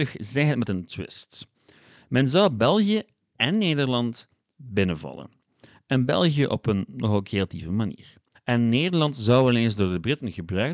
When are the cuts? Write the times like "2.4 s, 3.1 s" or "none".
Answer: 8.3 s